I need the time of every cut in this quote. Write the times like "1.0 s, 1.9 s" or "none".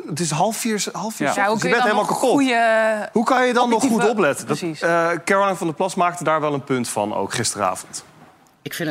none